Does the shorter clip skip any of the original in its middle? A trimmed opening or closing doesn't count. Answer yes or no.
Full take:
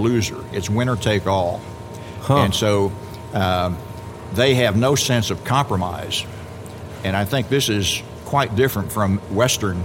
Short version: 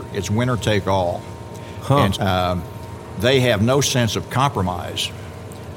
yes